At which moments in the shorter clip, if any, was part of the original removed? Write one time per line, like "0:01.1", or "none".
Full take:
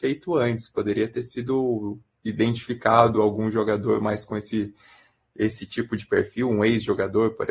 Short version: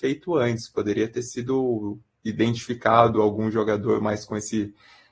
none